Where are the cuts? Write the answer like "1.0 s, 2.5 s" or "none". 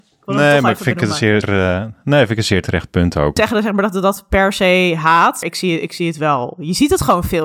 1.4 s, 3.4 s, 5.4 s